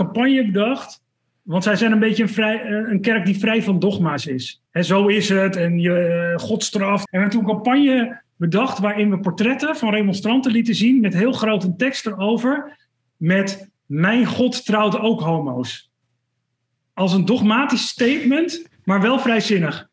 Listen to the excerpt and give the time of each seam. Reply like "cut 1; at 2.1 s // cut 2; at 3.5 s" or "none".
cut 1; at 4.7 s // cut 2; at 7.1 s